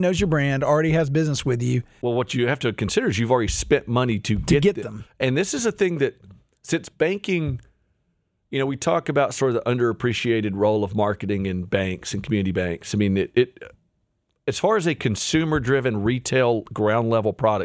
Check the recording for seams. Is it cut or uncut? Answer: uncut